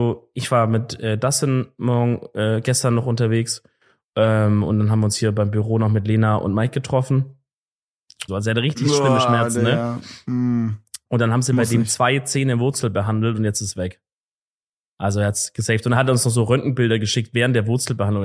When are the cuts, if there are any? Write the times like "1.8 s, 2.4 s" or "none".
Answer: 8.3 s